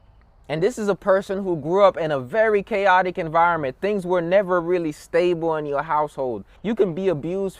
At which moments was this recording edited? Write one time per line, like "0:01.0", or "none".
0:06.6

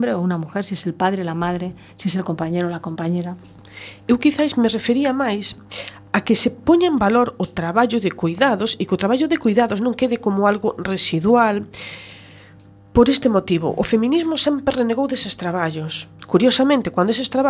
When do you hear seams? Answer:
none

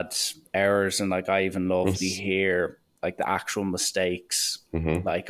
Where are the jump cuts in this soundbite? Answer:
0:01.9

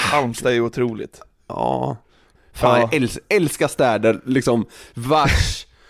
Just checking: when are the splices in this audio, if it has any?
0:02.4

